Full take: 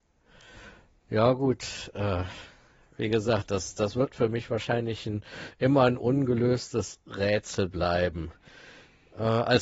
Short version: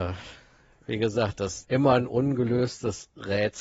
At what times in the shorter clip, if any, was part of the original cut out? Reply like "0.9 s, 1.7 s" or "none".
1.6 s